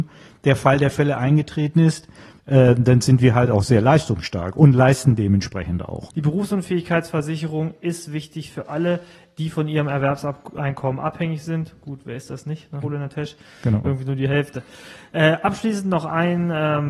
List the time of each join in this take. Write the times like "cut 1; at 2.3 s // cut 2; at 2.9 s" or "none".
cut 1; at 6.1 s // cut 2; at 12.8 s // cut 3; at 13.8 s